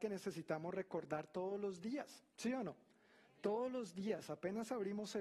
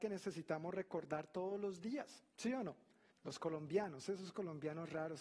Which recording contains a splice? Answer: second; 1 cut; at 3.1 s

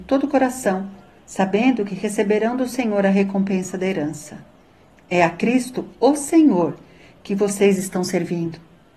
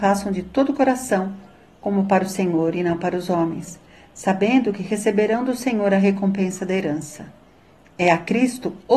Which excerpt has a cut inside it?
first; 1 cut; at 1.2 s

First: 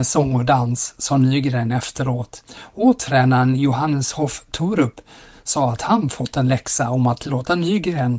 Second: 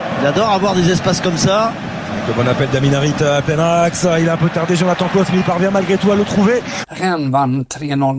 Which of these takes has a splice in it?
second; 1 cut; at 6.8 s

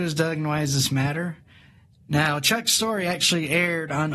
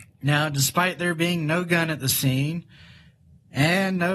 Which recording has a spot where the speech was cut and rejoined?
first; 1 cut; at 1.9 s

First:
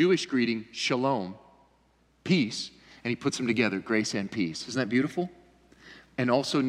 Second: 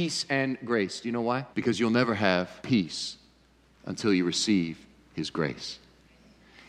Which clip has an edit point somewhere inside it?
second; 2 cuts; at 1.5 s, 2.6 s

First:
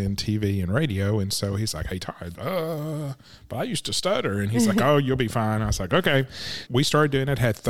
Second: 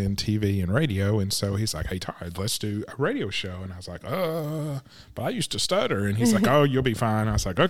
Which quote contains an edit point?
first; 2 cuts; at 2.3 s, 6.7 s

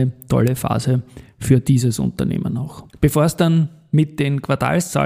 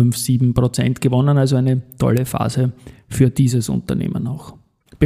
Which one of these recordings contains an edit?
first; 1 cut; at 2.9 s

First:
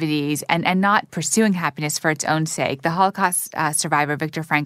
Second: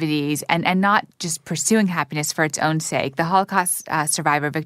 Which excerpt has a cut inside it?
first; 1 cut; at 1.1 s

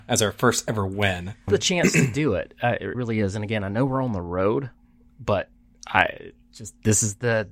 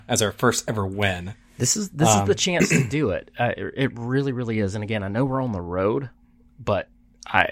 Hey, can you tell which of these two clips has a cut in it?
first; 2 cuts; at 1.5 s, 2.9 s

